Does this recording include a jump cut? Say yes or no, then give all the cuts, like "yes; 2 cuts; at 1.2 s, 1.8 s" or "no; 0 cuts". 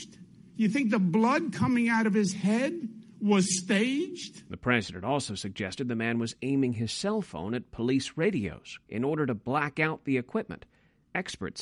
yes; 1 cut; at 8.8 s